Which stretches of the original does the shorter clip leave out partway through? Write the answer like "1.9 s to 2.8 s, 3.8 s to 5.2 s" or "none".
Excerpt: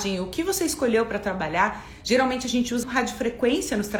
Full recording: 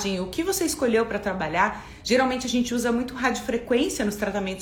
2.8 s to 3.1 s